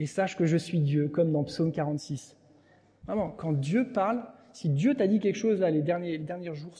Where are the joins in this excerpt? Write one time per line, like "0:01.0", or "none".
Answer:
0:03.0